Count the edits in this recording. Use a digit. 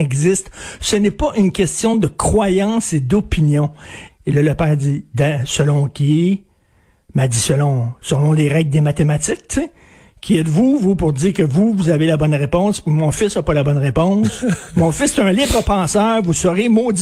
1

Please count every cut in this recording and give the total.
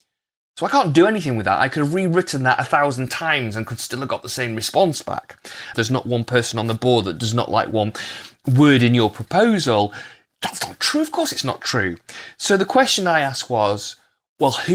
1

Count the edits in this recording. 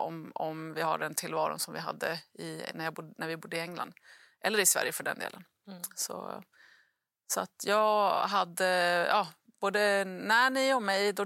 0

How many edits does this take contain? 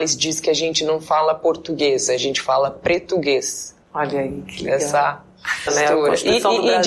2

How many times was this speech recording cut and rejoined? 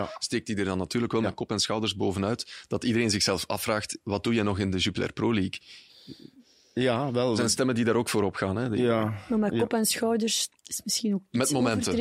1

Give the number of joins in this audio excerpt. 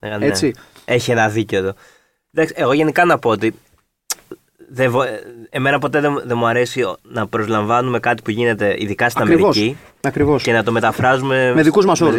0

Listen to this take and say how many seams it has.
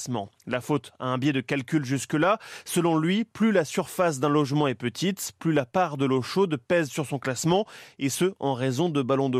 0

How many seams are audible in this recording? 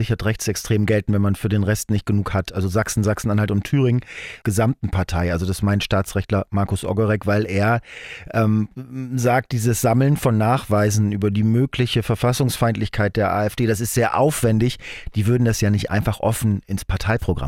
1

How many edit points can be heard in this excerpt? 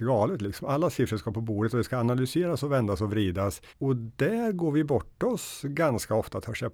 1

